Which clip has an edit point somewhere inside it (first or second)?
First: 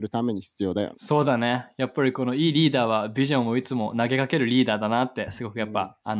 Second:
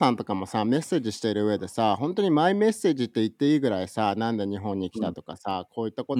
first